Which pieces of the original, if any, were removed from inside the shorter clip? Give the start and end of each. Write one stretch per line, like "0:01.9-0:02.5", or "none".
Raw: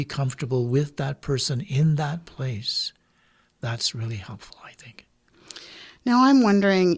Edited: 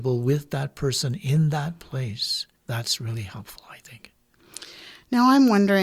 0:03.0-0:03.5